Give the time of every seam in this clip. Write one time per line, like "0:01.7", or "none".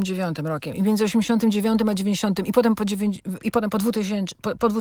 0:03.4

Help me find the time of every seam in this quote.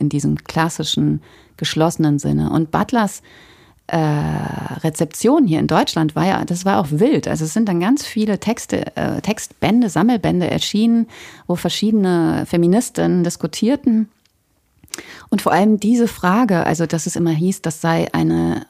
none

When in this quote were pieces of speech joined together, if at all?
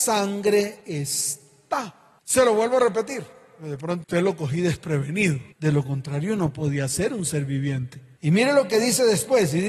0:04.0
0:05.5

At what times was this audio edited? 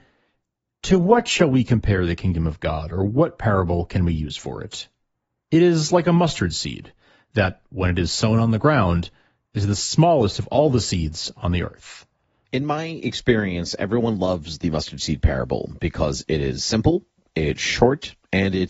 0:12.5

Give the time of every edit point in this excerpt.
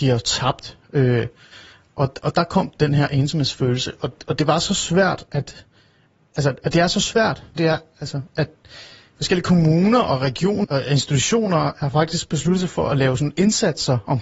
0:07.6
0:10.6

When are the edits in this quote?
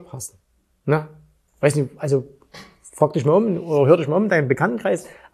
none

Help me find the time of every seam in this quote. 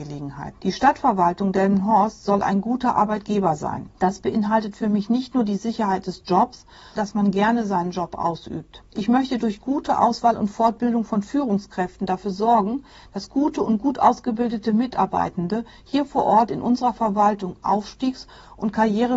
0:07.0

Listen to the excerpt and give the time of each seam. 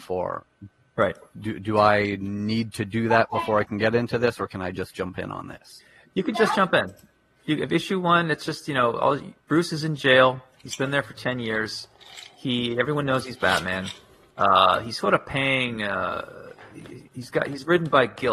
0:17.1

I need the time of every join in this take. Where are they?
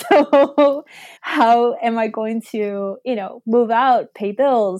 0:01.2

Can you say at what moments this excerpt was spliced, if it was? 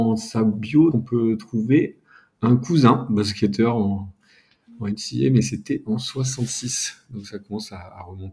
0:00.9

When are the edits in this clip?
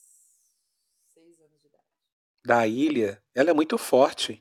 0:02.2

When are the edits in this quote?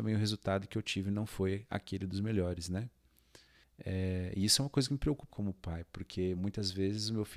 0:03.6
0:05.3

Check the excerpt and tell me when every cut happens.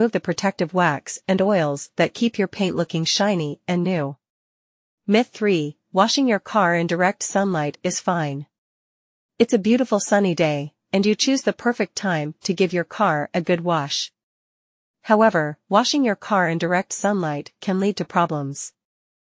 none

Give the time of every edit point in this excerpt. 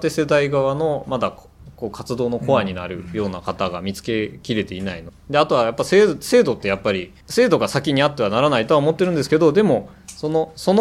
0:05.1
0:07.2

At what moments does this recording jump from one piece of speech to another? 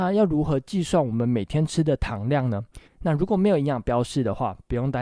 0:02.9

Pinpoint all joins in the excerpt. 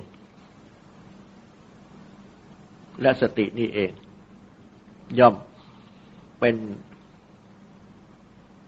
0:06.3

